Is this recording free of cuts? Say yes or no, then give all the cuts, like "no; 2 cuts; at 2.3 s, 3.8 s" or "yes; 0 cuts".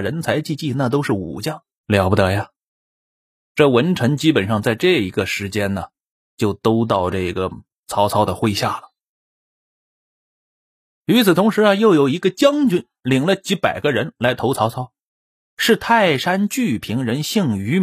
no; 1 cut; at 1.8 s